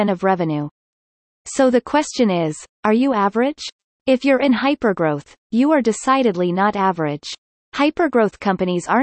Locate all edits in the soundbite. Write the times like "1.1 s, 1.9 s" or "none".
none